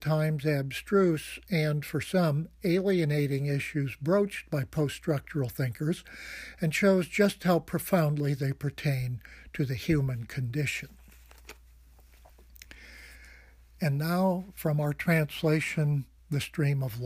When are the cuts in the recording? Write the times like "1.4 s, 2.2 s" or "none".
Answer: none